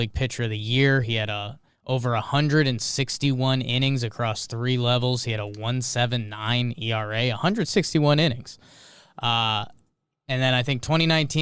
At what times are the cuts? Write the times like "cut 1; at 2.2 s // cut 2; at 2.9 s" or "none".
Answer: none